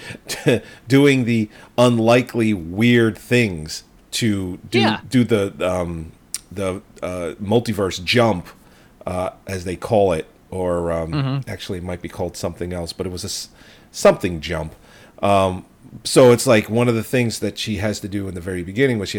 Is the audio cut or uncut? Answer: uncut